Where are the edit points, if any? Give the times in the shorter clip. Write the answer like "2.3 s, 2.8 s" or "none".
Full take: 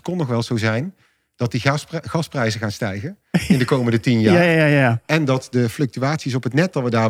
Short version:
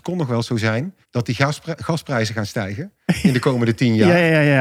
1.0 s